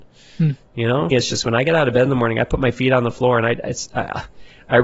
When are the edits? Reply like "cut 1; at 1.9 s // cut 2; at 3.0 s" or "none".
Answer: cut 1; at 1.1 s